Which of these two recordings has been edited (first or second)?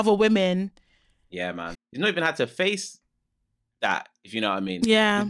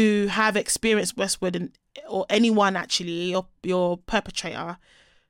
first